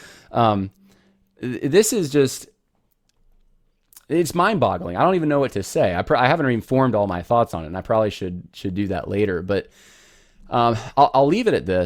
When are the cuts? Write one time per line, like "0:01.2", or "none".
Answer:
none